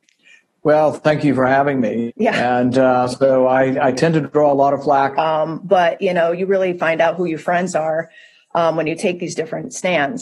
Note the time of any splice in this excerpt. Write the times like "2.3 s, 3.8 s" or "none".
2.1 s, 5.1 s